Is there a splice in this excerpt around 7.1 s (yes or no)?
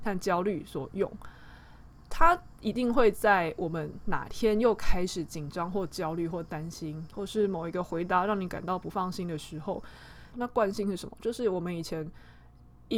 yes